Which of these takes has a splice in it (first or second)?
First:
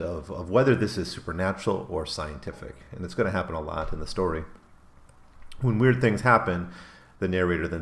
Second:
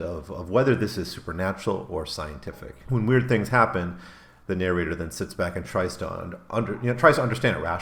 second